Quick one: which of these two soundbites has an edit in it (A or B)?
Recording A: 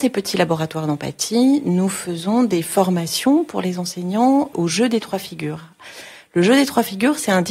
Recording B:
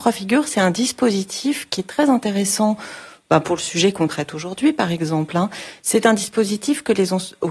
A